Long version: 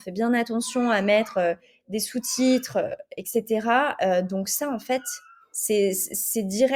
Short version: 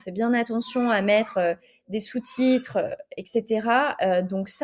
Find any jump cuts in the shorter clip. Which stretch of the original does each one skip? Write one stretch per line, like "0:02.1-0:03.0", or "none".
none